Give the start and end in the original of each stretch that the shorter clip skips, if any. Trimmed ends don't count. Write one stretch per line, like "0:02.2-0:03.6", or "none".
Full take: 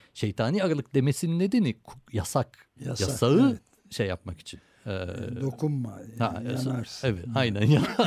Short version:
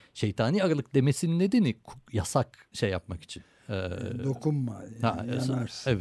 0:02.7-0:03.9